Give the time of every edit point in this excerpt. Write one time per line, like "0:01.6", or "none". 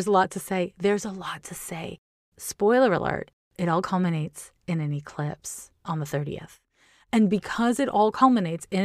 none